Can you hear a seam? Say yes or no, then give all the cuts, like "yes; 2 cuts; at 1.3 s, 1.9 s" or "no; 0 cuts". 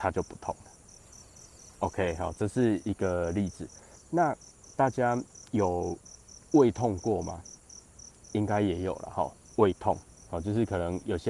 no; 0 cuts